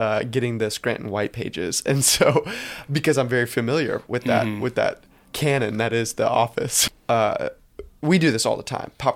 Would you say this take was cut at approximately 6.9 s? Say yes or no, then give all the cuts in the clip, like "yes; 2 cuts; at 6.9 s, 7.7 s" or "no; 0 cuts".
yes; 1 cut; at 6.9 s